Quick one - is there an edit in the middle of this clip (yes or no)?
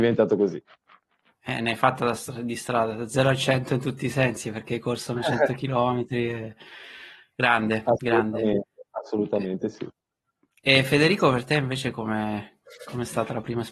no